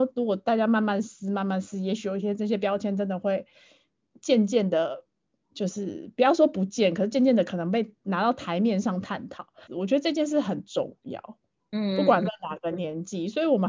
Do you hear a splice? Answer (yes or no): yes